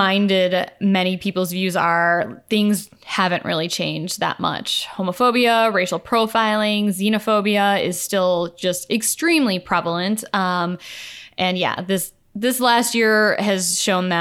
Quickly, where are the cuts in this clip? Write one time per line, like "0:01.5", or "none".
none

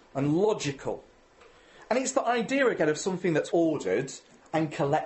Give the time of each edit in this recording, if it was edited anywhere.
0:03.5

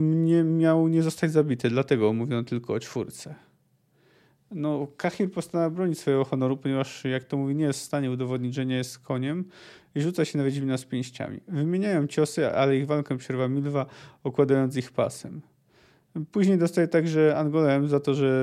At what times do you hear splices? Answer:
none

